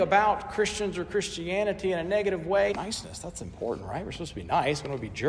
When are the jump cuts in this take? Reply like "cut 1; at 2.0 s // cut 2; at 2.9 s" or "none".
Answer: cut 1; at 2.7 s